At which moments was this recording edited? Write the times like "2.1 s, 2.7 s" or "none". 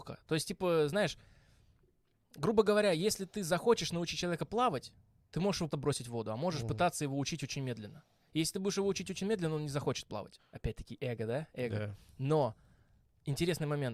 5.7 s, 10.4 s